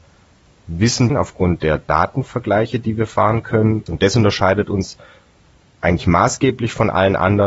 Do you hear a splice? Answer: yes; 2 cuts; at 1.1 s, 3.9 s

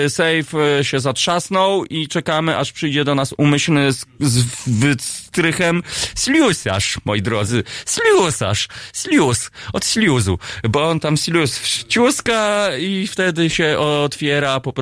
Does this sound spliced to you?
no; 0 cuts

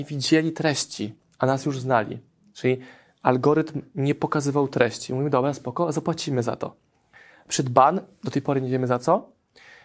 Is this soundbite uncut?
yes; 0 cuts

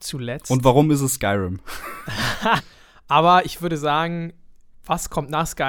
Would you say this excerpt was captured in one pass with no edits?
no; 1 cut; at 2.6 s

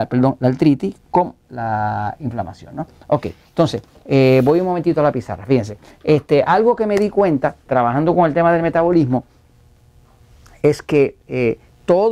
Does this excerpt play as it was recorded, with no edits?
no; 1 cut; at 7.7 s

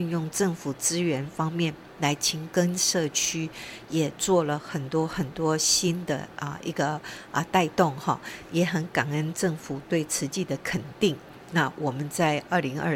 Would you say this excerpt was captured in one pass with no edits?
yes; 0 cuts

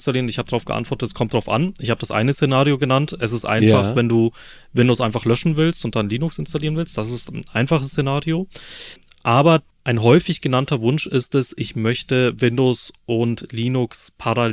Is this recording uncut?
yes; 0 cuts

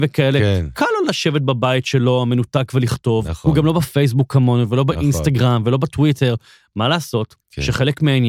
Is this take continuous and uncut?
yes; 0 cuts

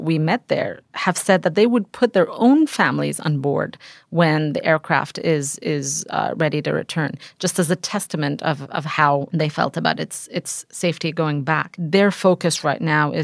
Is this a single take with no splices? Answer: yes; 0 cuts

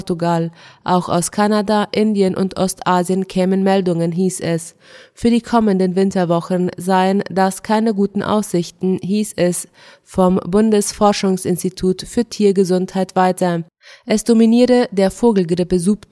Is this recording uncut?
yes; 0 cuts

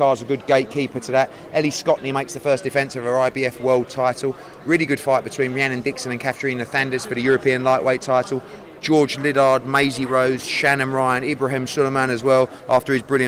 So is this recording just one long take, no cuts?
yes; 0 cuts

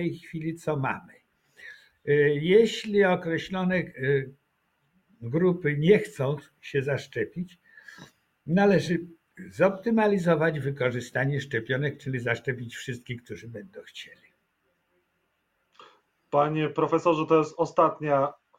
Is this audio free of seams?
yes; 0 cuts

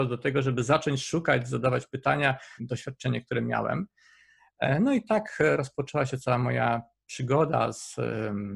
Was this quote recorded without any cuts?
no; 1 cut; at 2.6 s

